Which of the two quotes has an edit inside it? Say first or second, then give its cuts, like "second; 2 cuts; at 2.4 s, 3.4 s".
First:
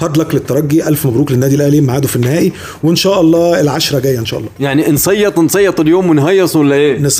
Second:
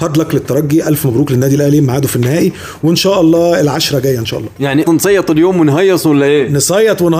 second; 1 cut; at 4.8 s